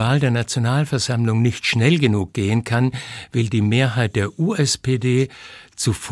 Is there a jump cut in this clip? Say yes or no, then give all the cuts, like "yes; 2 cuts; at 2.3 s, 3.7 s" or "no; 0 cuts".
no; 0 cuts